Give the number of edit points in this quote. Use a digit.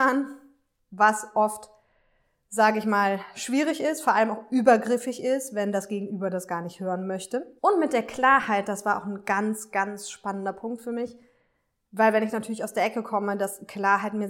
1